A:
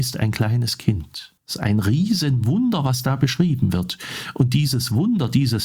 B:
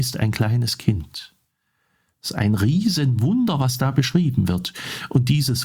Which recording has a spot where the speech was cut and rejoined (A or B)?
A